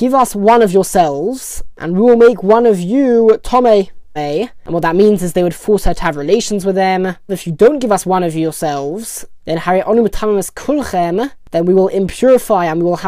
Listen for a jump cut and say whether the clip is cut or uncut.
cut